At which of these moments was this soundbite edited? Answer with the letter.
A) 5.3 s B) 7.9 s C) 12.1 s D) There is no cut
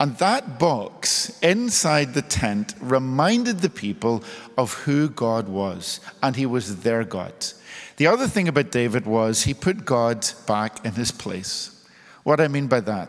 B